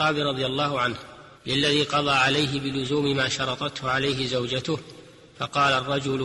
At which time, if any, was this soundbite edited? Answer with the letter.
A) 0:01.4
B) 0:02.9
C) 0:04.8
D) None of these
A